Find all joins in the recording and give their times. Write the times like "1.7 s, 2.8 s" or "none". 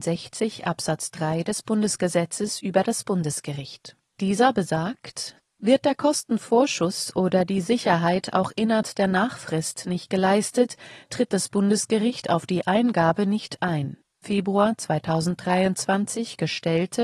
11.1 s, 14.2 s